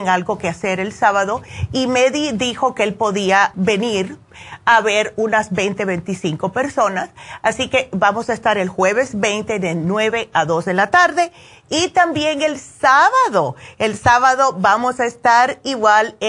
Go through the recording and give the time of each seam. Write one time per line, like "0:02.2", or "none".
0:03.5